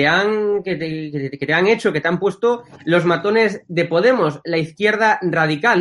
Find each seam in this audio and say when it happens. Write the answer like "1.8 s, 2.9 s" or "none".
none